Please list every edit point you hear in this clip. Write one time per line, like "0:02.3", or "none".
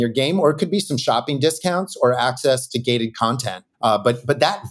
0:03.7